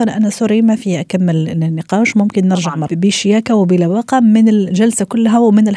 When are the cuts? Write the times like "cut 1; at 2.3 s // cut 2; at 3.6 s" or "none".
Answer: cut 1; at 2.9 s